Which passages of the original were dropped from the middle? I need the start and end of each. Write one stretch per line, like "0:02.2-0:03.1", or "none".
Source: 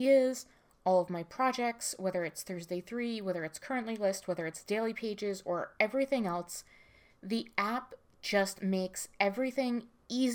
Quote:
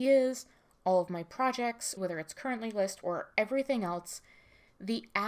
0:02.0-0:03.2
0:04.3-0:05.4